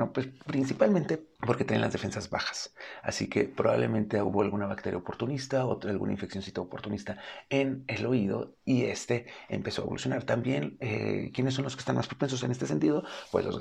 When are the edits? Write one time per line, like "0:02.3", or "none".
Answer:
0:01.3